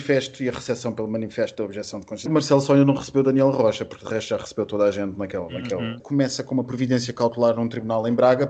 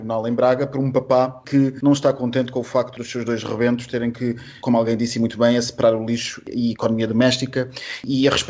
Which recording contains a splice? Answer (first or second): first